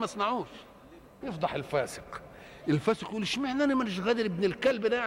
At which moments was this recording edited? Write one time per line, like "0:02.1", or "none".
0:01.2